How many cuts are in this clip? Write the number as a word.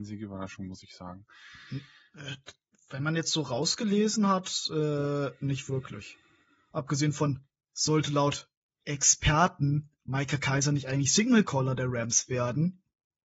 zero